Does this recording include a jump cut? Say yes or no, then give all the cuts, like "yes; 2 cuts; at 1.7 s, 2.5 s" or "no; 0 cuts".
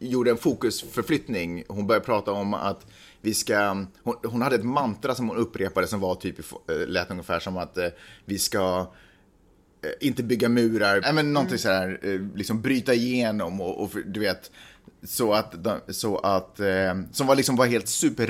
yes; 1 cut; at 11.0 s